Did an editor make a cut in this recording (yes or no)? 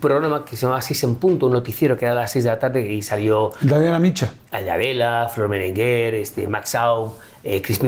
no